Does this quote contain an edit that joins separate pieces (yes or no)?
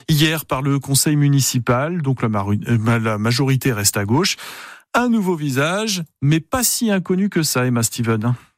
no